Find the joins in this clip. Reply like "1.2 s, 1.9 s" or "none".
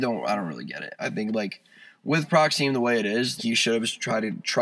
1.0 s, 3.4 s